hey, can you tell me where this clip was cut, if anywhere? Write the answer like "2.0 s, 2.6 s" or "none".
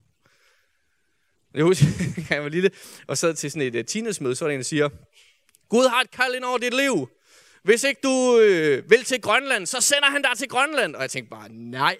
none